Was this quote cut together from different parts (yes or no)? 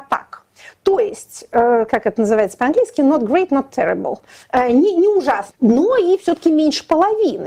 yes